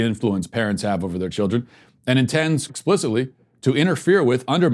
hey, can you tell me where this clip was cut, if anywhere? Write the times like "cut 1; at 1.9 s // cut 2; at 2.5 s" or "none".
cut 1; at 2.7 s